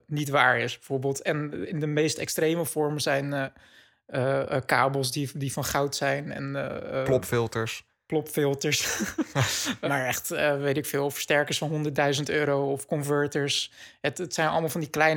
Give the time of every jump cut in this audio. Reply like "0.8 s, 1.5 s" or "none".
9.9 s